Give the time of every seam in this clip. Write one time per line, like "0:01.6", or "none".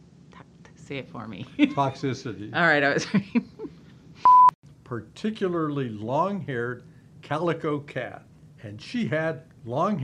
none